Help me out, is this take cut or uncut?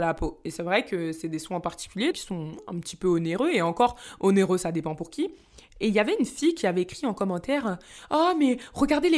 cut